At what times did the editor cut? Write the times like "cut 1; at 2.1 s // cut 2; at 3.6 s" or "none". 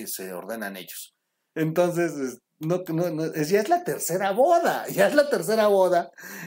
cut 1; at 1.5 s